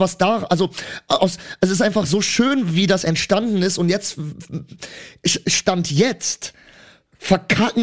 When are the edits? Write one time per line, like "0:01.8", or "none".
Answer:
none